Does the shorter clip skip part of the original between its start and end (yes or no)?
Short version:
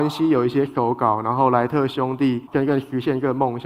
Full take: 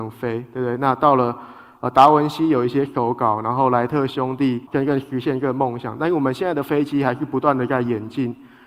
no